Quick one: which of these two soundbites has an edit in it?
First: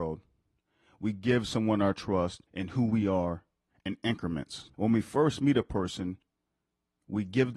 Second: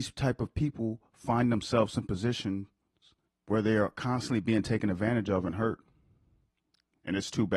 first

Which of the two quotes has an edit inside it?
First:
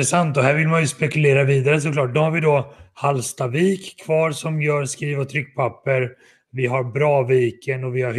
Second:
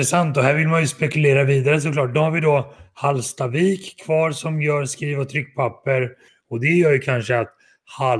second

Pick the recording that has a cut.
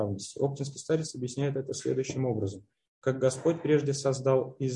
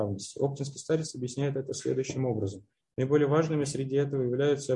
second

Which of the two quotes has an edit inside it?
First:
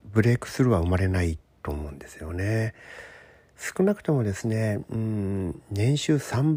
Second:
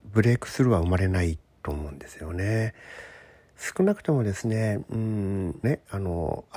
second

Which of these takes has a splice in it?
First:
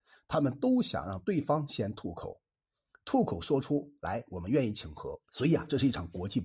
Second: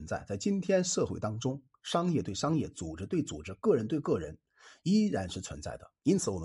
first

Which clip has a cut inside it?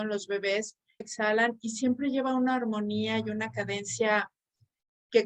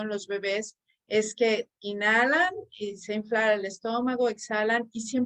first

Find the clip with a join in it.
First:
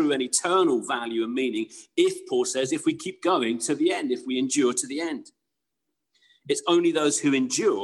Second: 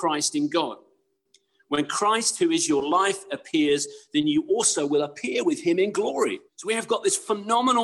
second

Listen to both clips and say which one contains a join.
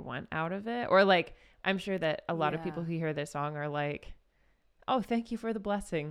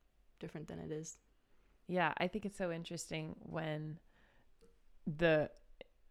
second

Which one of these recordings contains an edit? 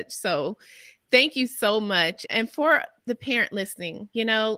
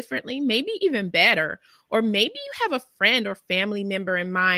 first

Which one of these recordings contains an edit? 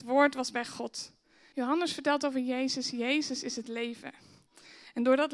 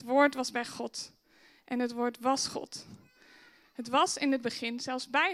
first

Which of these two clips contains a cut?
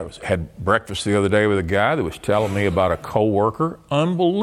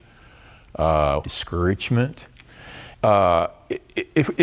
second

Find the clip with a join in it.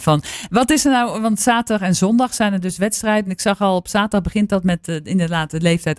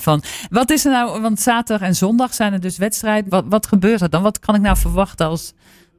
second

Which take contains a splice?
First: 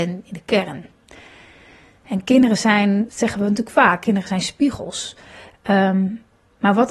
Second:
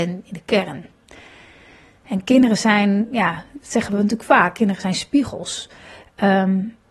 first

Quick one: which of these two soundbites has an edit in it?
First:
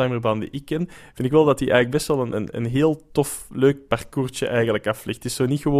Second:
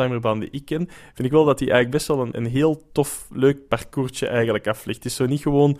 second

